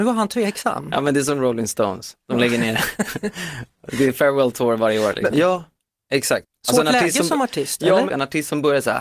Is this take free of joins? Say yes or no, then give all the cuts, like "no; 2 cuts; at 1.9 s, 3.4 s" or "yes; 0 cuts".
no; 2 cuts; at 5.3 s, 8.1 s